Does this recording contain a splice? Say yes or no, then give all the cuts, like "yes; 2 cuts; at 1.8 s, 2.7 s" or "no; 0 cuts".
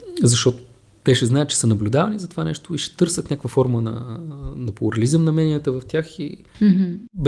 no; 0 cuts